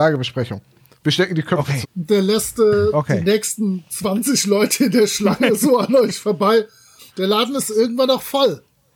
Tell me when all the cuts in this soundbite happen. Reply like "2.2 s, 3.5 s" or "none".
1.8 s, 7.1 s